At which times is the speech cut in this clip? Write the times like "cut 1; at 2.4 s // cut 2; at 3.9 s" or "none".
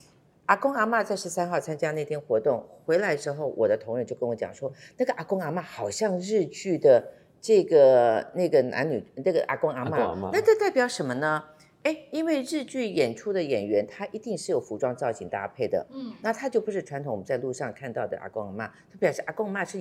none